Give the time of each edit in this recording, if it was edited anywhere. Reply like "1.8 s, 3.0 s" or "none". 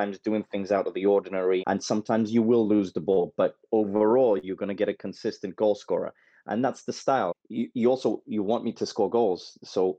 1.6 s, 7.3 s